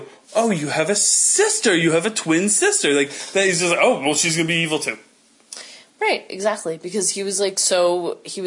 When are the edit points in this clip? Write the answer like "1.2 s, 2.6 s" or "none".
none